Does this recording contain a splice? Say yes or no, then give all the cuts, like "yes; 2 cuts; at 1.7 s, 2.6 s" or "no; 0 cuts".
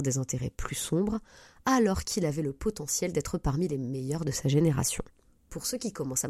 no; 0 cuts